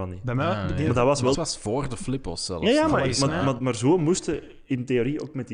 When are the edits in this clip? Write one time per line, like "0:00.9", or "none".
0:01.3
0:03.6

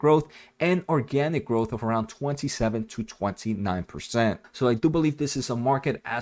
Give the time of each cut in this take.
0:04.4

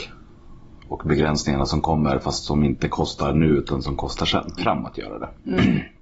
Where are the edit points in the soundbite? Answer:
0:04.6

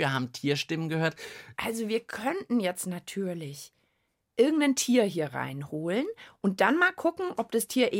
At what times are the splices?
0:01.5

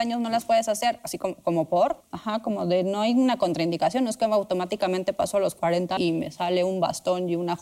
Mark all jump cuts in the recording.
0:02.0
0:06.0

